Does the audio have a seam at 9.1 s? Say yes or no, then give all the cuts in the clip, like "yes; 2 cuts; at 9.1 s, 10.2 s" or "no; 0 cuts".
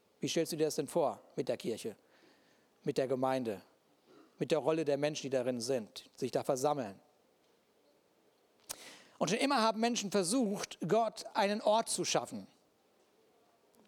no; 0 cuts